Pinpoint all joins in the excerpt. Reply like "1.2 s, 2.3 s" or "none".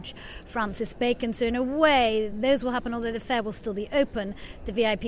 none